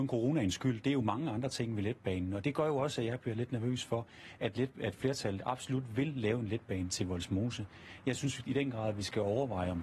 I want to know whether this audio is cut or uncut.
uncut